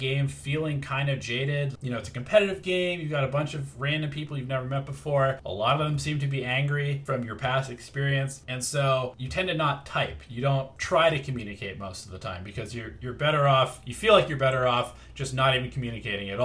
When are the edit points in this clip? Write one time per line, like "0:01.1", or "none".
0:01.8